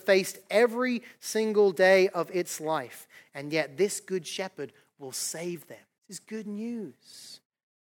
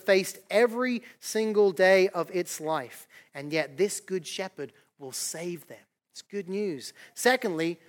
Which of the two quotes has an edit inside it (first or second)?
first